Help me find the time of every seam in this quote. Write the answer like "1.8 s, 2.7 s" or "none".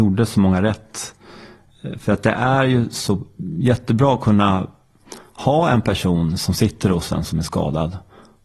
none